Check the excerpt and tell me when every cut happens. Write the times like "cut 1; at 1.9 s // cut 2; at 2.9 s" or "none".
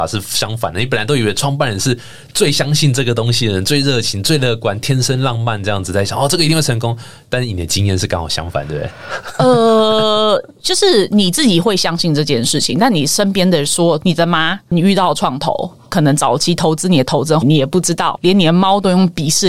cut 1; at 14.0 s // cut 2; at 17.4 s